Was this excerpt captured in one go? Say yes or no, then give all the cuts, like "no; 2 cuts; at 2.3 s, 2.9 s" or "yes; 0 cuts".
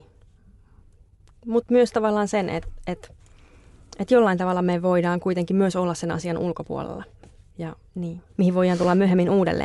no; 1 cut; at 8.3 s